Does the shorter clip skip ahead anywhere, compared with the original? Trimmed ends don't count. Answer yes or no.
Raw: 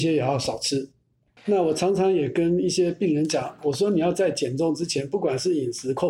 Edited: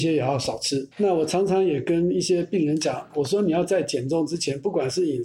yes